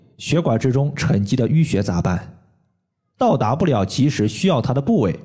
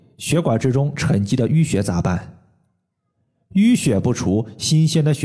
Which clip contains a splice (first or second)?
first